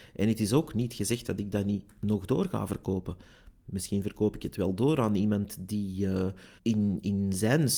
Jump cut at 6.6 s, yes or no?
yes